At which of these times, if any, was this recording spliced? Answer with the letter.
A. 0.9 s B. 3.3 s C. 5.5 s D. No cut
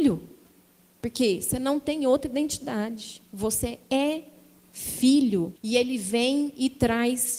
C